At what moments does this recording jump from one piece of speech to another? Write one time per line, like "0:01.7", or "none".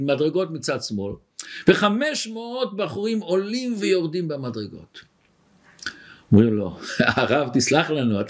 none